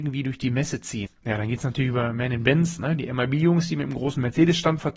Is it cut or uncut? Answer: cut